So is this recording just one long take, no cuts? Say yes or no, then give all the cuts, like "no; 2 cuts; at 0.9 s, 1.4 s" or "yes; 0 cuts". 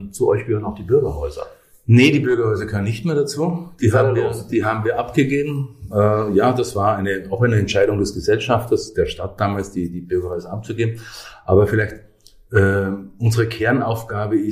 yes; 0 cuts